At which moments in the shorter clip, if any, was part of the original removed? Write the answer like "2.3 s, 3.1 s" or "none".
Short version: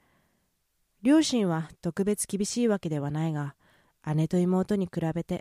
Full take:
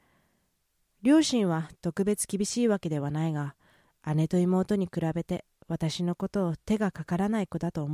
none